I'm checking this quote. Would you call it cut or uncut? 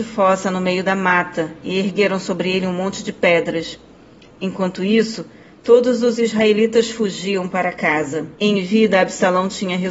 cut